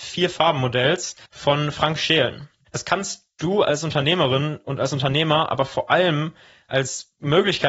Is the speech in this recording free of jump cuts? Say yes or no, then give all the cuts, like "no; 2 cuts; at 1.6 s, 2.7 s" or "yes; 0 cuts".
no; 2 cuts; at 1.2 s, 2.7 s